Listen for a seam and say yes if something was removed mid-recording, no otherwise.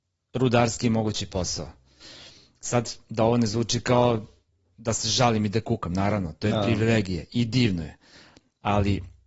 no